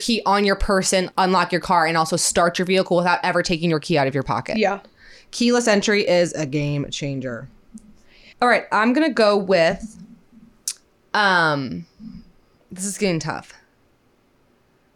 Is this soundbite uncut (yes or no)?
no